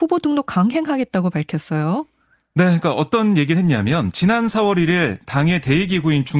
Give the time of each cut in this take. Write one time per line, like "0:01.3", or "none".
none